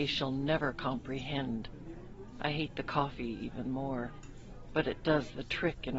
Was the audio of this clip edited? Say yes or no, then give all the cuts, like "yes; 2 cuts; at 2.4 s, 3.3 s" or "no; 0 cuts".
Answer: no; 0 cuts